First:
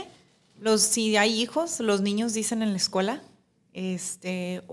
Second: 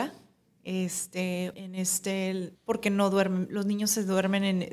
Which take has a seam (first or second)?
second